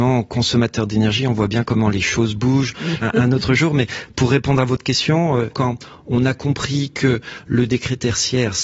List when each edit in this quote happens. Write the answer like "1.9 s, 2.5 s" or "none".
3.0 s, 5.5 s